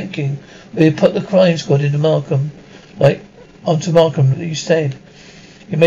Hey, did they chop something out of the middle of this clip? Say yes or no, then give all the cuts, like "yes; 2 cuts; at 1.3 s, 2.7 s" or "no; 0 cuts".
yes; 1 cut; at 4.3 s